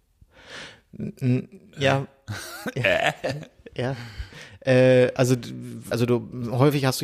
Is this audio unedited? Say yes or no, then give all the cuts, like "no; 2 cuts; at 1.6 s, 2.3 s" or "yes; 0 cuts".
no; 1 cut; at 5.9 s